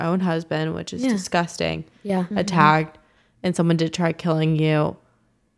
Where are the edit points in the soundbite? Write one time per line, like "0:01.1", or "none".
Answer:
0:02.3

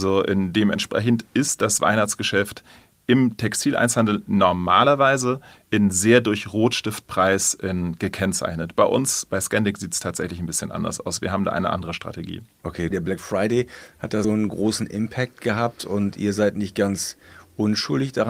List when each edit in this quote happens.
0:12.9
0:14.2

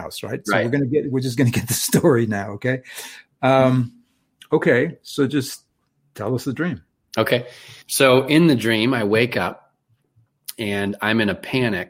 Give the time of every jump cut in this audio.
0:07.8

